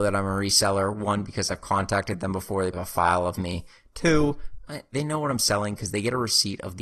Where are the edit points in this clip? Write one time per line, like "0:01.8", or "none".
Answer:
0:02.7
0:04.9